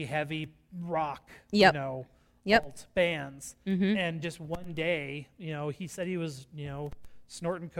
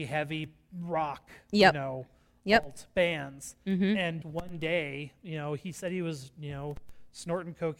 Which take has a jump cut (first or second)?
second